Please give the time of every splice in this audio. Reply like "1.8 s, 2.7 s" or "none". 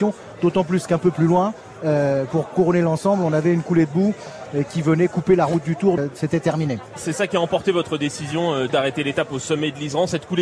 6.0 s, 8.7 s